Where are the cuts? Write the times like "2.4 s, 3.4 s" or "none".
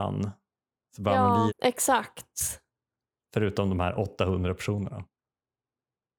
1.5 s